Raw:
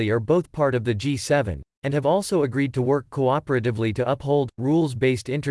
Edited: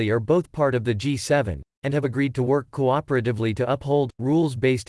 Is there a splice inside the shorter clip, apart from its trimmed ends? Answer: yes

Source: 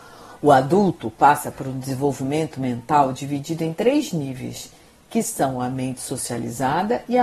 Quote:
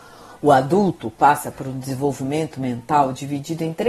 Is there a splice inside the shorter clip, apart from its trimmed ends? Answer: no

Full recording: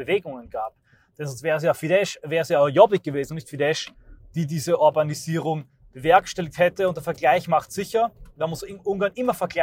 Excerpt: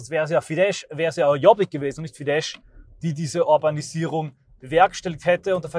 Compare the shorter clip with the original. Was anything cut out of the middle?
no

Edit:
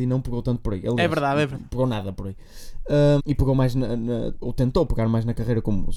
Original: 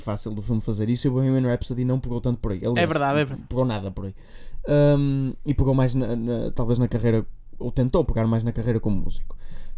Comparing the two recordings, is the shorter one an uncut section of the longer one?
no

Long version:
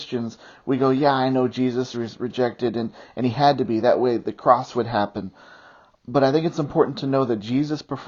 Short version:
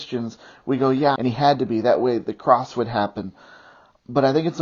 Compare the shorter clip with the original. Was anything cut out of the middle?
yes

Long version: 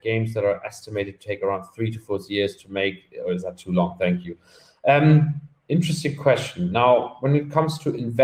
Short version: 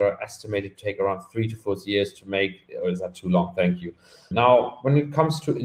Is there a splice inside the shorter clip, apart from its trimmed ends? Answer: yes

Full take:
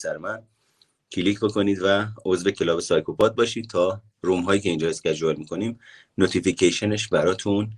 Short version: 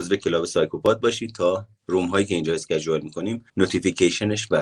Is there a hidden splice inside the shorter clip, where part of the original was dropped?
yes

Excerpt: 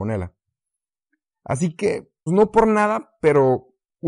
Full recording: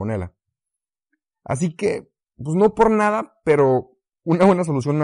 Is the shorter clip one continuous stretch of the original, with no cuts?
no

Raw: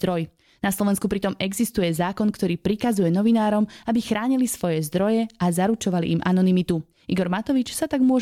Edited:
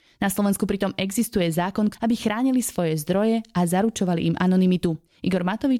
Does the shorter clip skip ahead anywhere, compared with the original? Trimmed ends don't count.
yes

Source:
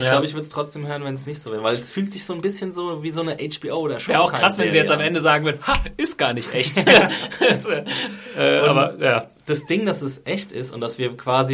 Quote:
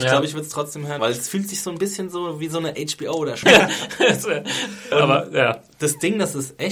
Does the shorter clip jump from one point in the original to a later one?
yes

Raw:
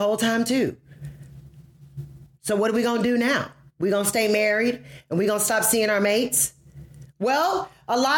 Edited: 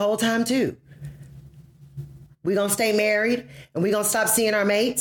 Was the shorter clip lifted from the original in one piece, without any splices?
no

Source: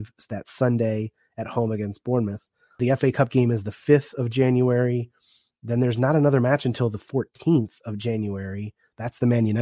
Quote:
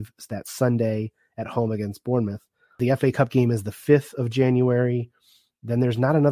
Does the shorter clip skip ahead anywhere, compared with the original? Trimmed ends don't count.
no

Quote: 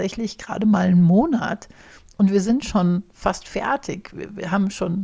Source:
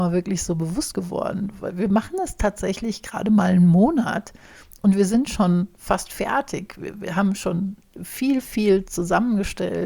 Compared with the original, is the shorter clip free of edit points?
yes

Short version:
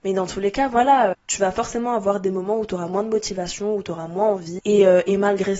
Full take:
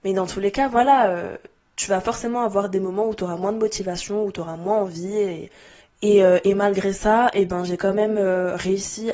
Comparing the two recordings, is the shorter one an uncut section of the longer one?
no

